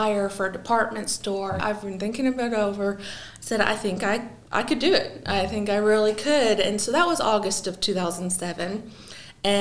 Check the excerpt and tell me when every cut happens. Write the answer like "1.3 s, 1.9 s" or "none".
1.6 s